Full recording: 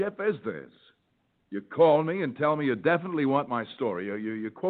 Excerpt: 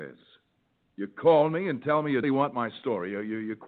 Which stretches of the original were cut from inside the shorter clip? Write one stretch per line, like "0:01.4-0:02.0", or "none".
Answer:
0:02.8-0:03.2